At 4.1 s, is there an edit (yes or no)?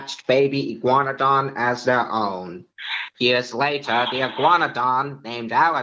no